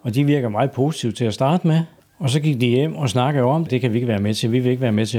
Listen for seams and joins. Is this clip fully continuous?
no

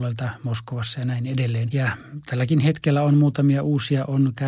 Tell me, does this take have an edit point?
yes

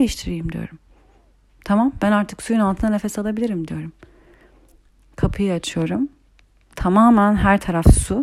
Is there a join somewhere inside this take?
no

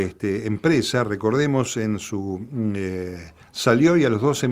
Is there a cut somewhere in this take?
yes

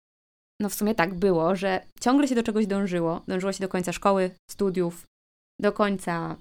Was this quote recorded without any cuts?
yes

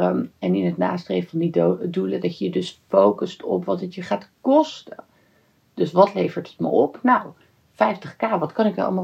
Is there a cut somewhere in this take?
no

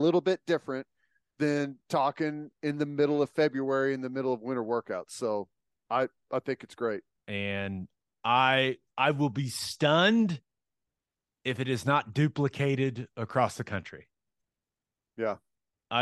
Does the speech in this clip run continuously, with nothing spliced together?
no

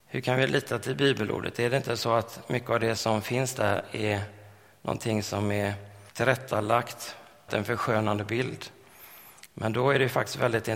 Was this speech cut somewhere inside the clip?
yes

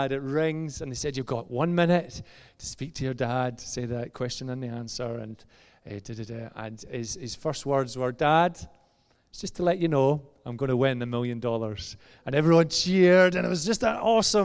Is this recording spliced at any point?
no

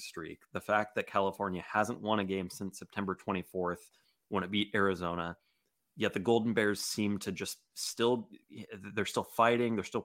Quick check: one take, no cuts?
yes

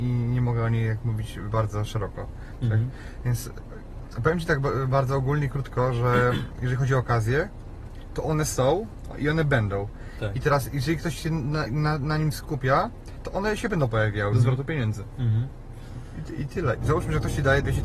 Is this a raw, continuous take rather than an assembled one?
no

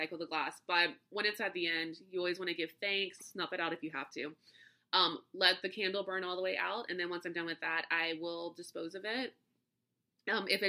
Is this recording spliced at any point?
yes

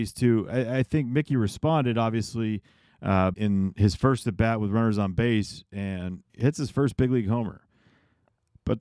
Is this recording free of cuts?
no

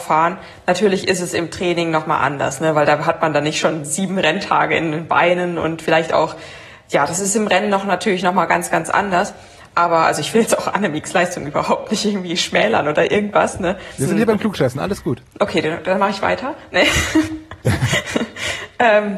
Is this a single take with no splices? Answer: no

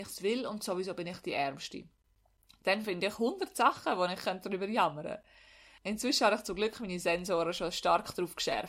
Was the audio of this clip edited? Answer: no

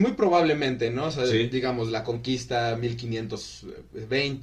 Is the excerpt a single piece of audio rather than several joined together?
yes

